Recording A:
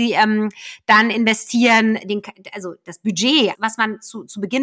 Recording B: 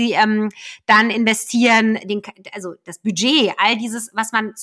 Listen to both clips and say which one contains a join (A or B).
A